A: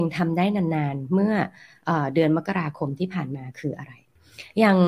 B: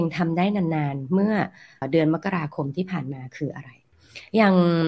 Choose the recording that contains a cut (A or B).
B